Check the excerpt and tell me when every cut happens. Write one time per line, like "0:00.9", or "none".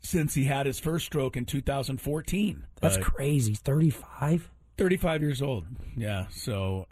0:02.7